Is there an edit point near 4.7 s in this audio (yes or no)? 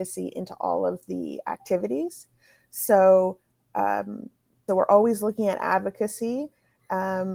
yes